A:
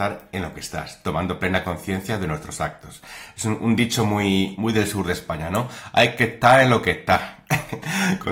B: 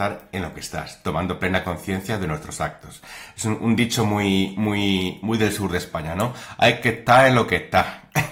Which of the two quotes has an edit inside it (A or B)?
A